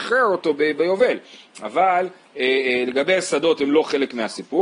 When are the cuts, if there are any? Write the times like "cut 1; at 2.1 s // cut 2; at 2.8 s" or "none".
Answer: none